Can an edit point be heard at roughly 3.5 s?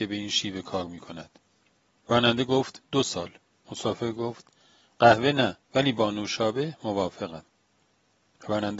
yes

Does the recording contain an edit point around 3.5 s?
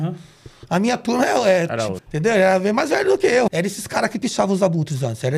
yes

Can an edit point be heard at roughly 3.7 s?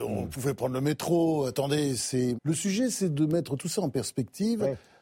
no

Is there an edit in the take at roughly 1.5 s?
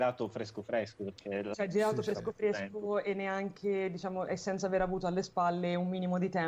yes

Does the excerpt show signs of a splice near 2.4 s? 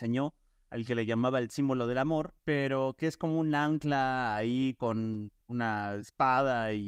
yes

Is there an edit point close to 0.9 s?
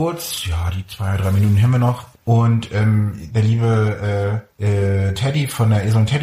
no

